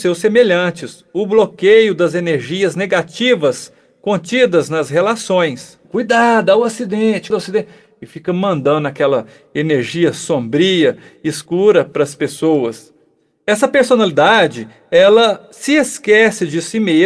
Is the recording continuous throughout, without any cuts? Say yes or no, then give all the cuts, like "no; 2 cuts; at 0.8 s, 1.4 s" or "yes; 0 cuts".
no; 2 cuts; at 5.8 s, 7.3 s